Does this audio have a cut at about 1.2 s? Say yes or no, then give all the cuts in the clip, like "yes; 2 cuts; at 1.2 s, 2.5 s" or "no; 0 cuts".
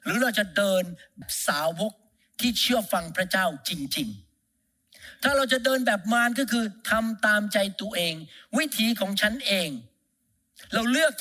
yes; 1 cut; at 1.2 s